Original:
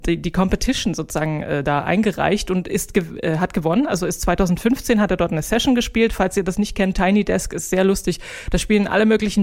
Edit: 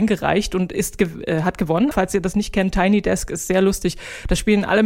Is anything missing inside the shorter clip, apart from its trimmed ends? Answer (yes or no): yes